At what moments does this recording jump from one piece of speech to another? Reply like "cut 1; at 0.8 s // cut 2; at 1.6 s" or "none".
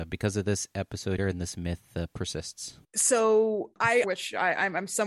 cut 1; at 1.2 s // cut 2; at 2.8 s // cut 3; at 4.0 s